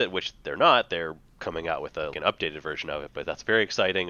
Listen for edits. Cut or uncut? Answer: cut